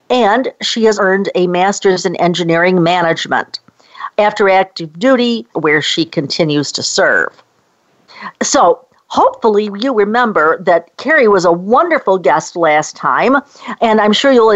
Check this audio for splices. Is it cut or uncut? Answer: cut